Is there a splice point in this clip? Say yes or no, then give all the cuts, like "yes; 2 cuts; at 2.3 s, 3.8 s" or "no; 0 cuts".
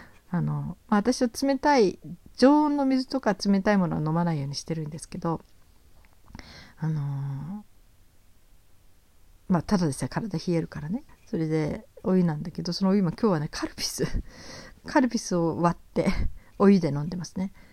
yes; 1 cut; at 11.1 s